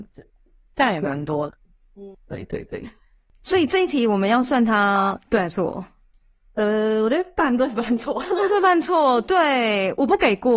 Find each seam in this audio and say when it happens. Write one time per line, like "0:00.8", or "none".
0:02.1